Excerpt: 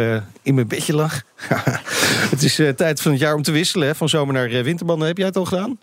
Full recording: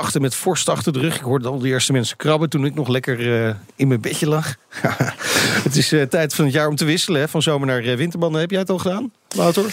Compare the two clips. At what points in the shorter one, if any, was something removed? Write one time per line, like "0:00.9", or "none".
none